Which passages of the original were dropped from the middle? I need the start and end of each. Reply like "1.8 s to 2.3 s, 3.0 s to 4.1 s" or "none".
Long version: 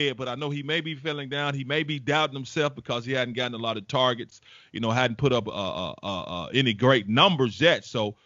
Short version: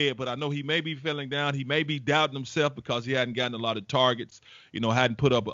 none